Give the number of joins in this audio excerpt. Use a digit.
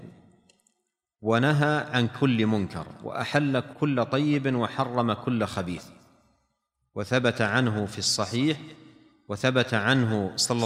1